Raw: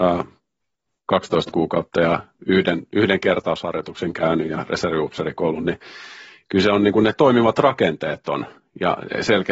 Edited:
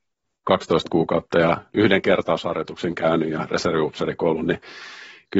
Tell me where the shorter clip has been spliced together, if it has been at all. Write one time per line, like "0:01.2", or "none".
0:01.7

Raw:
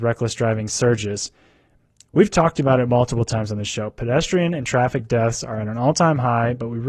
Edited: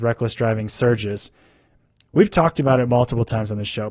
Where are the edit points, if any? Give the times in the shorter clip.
none

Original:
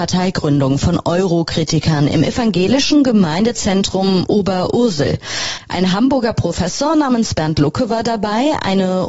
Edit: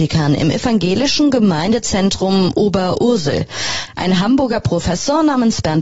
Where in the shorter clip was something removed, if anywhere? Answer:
none

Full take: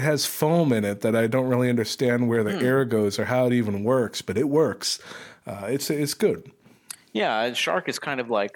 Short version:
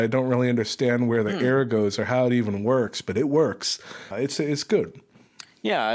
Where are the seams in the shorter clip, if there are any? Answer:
0:04.1

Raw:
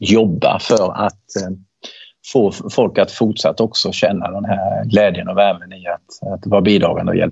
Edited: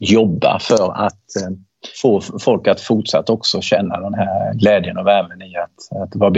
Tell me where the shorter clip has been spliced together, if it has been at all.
0:01.9

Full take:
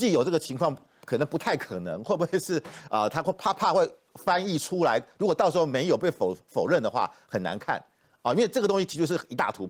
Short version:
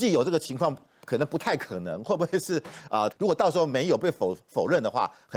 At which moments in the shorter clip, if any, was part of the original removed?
0:03.1

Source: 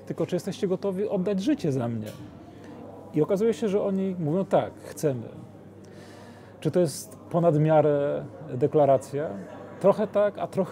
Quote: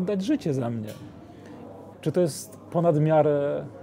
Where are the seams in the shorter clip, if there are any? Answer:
0:01.9

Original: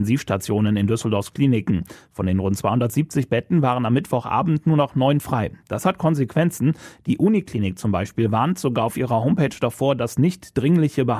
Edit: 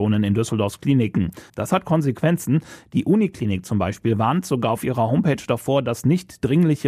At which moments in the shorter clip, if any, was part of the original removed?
0:01.5

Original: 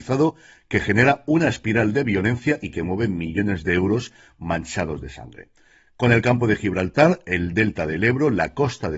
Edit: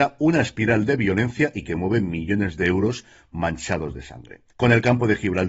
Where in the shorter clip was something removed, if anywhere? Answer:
0:04.5

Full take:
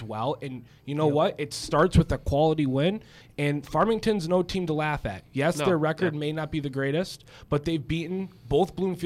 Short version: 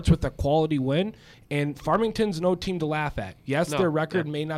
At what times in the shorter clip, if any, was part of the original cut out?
none

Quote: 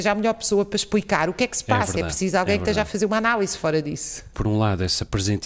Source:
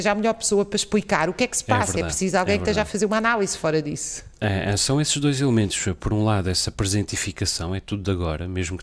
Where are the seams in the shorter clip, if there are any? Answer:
0:04.3

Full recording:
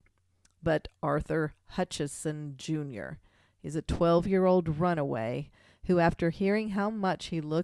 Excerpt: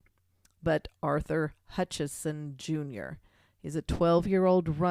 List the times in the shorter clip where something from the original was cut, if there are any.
none

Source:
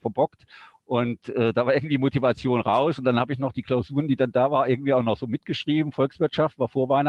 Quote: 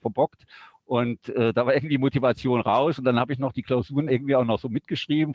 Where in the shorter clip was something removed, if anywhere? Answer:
0:04.1

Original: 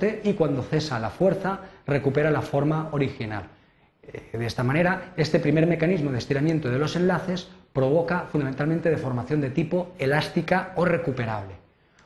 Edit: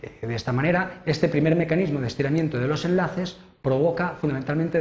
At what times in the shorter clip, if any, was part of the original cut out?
none

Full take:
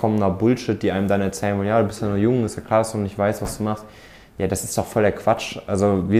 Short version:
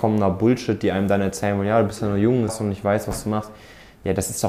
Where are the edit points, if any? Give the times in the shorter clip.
0:02.5

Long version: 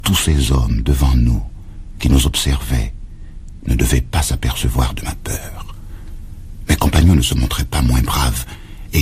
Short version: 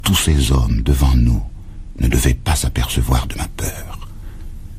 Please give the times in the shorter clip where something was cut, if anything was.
0:01.9

